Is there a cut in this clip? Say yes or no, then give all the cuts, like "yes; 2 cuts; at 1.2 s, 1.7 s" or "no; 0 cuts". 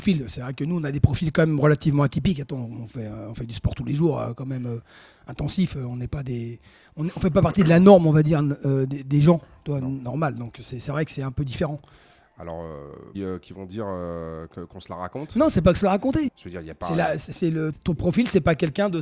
yes; 3 cuts; at 13.1 s, 16.3 s, 17.7 s